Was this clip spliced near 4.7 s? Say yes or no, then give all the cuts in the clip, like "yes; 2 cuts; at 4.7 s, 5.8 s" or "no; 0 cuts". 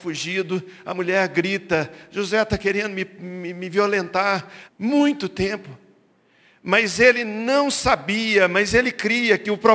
yes; 1 cut; at 4.7 s